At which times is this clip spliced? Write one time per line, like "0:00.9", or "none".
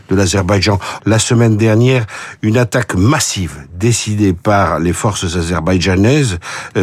0:01.0